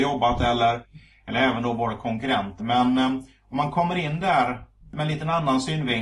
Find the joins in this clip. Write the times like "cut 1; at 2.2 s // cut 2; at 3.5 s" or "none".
cut 1; at 2.6 s